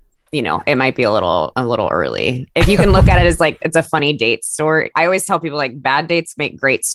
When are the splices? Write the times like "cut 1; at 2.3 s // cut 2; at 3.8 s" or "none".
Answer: cut 1; at 4.9 s